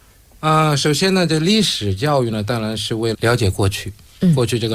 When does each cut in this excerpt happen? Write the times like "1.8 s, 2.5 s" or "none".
3.1 s

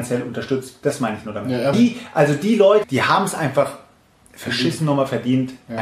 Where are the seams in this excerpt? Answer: 1.7 s, 2.8 s

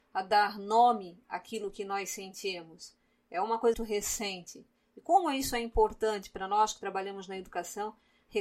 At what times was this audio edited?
3.7 s

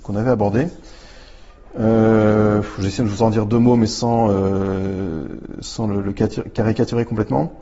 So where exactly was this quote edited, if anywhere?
none

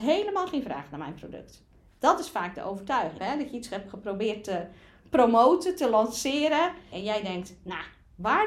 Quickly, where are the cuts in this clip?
3.2 s, 6.9 s

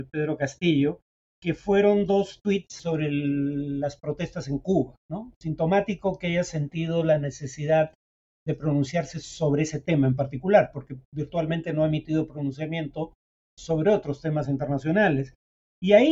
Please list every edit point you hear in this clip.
none

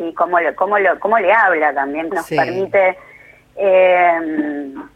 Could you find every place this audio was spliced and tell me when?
2.1 s

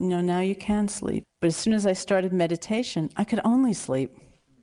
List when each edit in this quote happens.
1.2 s

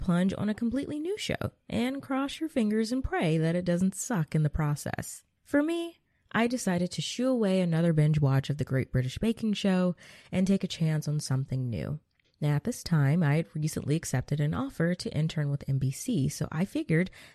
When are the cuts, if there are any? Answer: none

